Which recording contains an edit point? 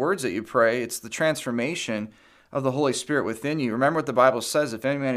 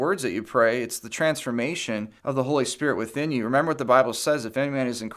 second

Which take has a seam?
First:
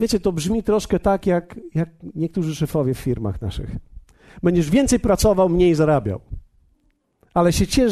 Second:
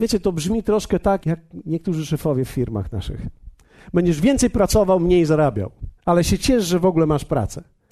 second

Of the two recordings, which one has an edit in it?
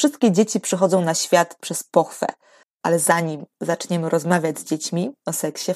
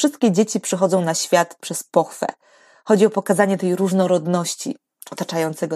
first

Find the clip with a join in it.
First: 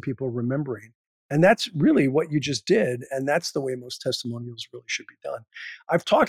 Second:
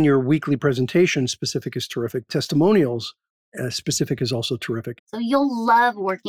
second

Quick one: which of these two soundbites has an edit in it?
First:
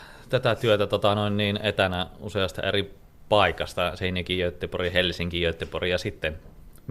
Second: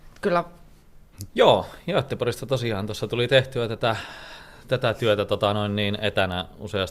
second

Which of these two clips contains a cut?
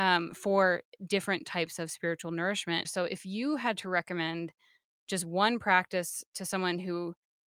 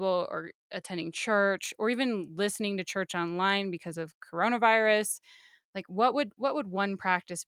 first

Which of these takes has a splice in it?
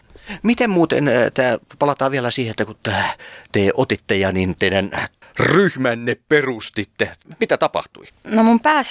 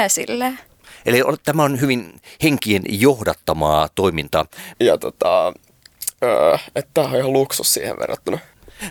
second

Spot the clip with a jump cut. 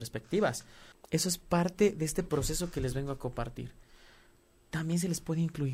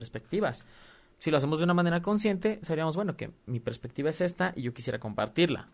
first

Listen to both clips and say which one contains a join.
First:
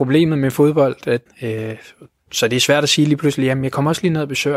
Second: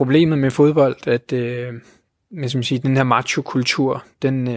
first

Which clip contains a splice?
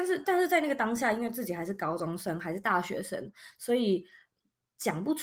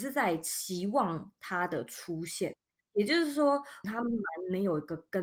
second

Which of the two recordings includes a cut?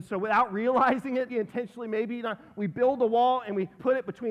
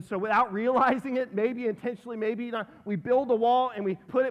first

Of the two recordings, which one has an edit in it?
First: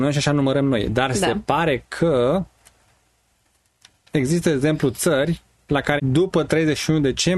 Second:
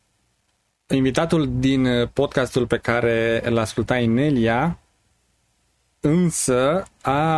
first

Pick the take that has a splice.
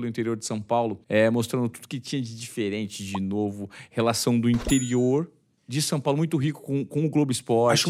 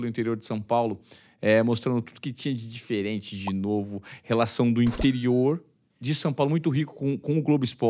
first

